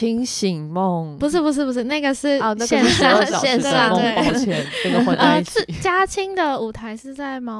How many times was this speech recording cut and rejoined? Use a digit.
0